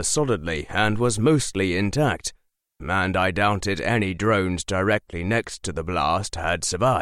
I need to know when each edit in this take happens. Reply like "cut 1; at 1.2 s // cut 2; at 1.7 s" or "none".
cut 1; at 2.8 s